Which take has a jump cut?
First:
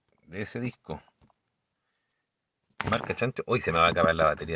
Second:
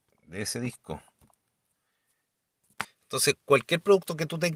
second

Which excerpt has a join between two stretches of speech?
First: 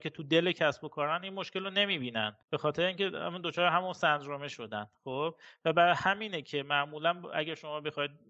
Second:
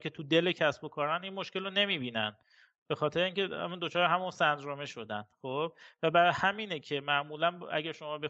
first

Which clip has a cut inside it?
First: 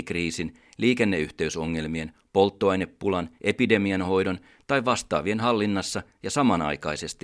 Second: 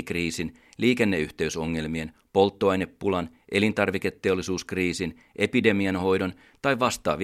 first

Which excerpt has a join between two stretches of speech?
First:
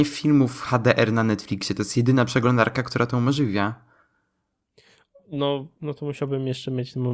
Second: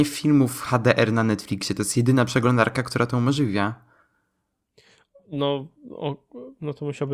first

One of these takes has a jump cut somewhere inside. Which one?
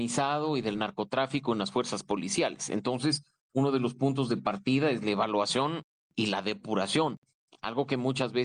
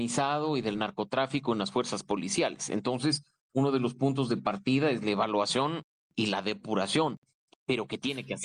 second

